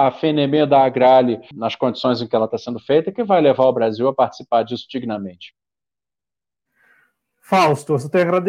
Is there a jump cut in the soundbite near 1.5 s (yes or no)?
yes